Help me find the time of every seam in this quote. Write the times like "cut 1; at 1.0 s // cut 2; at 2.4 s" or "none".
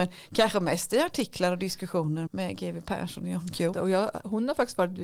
cut 1; at 2.3 s // cut 2; at 3.7 s